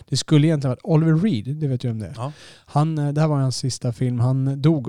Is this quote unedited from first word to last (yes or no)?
yes